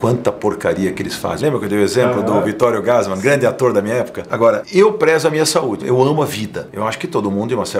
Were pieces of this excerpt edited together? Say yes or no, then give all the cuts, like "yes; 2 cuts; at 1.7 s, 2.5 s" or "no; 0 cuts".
yes; 3 cuts; at 1.4 s, 4.3 s, 5.8 s